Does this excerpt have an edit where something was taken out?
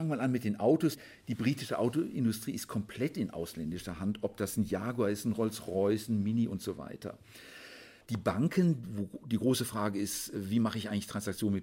yes; 1 cut; at 8.0 s

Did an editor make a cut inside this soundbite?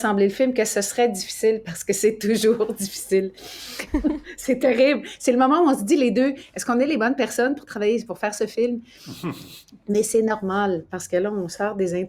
yes; 1 cut; at 3.9 s

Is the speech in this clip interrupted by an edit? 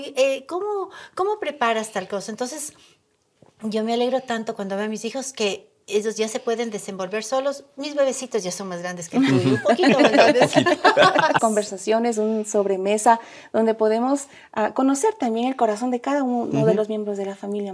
yes; 1 cut; at 11.4 s

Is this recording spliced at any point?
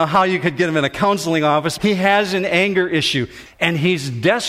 yes; 2 cuts; at 1.8 s, 3.5 s

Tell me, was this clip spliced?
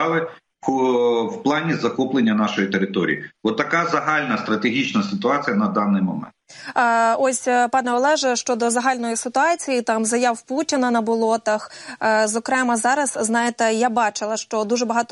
no; 0 cuts

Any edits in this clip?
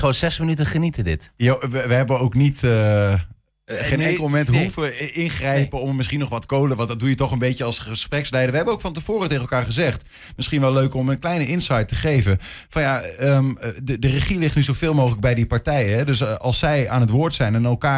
no; 0 cuts

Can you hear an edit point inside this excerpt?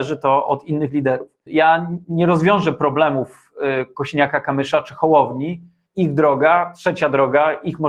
yes; 2 cuts; at 1.5 s, 5.9 s

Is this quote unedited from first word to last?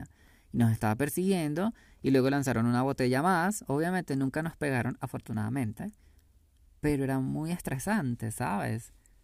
yes; 0 cuts

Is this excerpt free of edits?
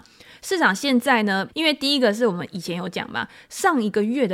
no; 1 cut; at 1.5 s

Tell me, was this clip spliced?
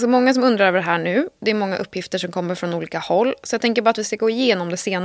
no; 0 cuts

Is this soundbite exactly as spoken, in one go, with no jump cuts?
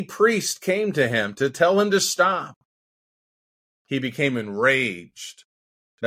yes; 0 cuts

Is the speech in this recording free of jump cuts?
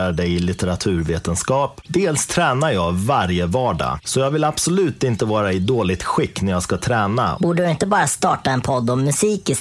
no; 2 cuts; at 1.8 s, 7.4 s

